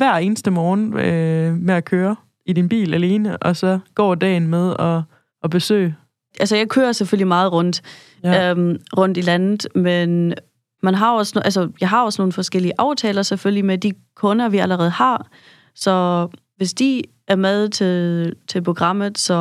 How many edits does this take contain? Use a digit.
0